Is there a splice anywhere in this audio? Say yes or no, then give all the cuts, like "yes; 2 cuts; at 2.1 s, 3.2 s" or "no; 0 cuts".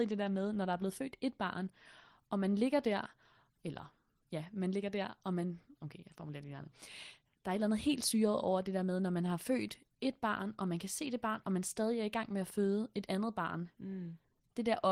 no; 0 cuts